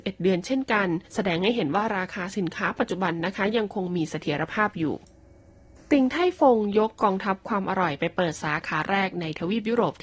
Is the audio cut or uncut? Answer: uncut